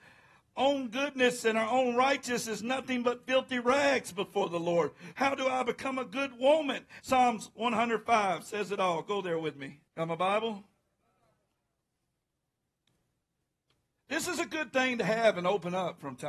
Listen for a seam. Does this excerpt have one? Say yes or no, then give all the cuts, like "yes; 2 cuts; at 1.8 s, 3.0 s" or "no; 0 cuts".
yes; 3 cuts; at 5.1 s, 7.0 s, 9.9 s